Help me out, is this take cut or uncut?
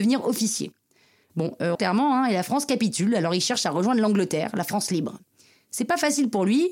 cut